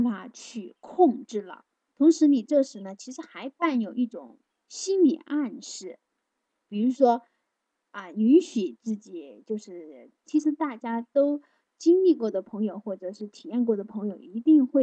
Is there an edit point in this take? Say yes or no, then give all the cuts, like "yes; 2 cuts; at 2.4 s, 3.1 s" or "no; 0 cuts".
yes; 1 cut; at 10.2 s